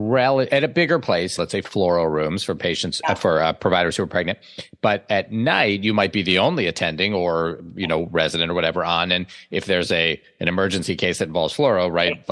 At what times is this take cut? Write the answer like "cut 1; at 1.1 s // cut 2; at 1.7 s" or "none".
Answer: cut 1; at 1.4 s